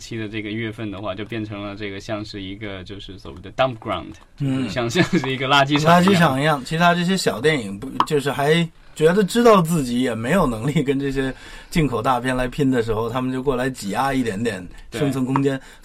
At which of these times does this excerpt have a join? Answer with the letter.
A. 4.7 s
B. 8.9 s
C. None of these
C